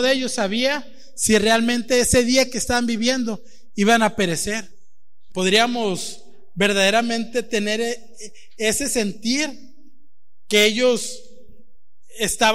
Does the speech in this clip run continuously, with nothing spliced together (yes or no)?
no